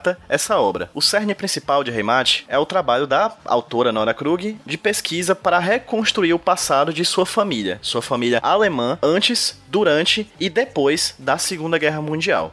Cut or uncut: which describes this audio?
uncut